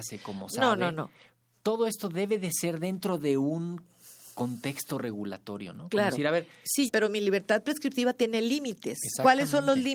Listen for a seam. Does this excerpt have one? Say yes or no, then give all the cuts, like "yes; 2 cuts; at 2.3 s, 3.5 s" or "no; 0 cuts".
yes; 1 cut; at 6.9 s